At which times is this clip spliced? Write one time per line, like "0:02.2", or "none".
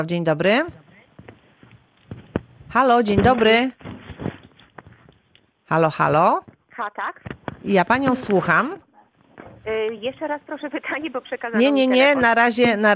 none